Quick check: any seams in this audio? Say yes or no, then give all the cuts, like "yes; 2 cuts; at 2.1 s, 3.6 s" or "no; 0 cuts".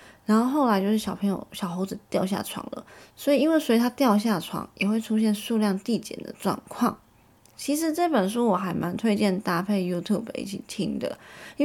no; 0 cuts